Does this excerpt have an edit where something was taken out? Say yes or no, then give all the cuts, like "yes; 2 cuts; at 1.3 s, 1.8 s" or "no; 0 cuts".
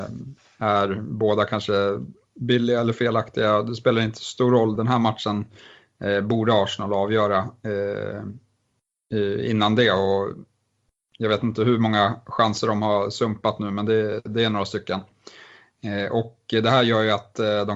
no; 0 cuts